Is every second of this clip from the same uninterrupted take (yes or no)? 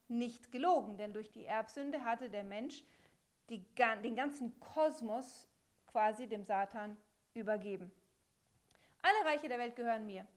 yes